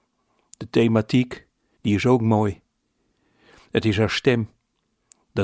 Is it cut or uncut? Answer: cut